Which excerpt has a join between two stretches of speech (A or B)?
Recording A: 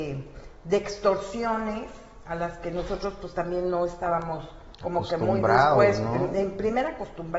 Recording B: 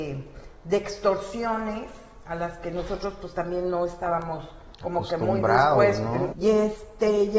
B